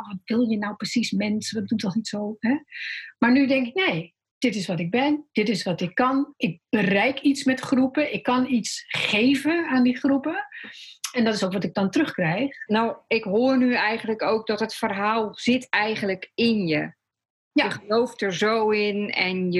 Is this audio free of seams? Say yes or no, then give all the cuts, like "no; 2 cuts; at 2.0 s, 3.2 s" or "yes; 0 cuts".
yes; 0 cuts